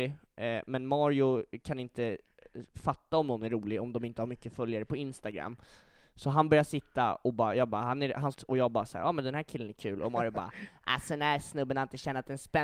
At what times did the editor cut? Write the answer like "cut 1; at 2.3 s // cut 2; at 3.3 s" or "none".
cut 1; at 8.3 s